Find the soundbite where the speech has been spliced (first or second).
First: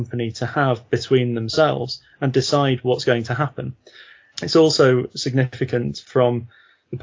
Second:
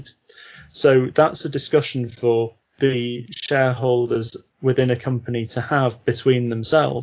first